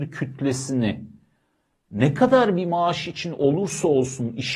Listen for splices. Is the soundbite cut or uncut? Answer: uncut